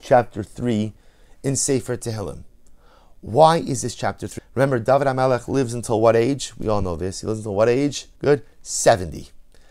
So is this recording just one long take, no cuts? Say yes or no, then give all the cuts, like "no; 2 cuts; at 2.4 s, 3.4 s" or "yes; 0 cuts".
no; 2 cuts; at 4.4 s, 8.2 s